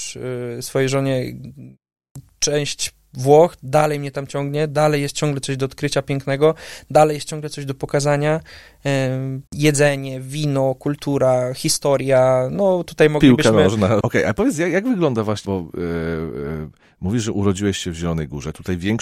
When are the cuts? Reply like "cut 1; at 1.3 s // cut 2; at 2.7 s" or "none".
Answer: cut 1; at 9.5 s // cut 2; at 14.0 s // cut 3; at 15.4 s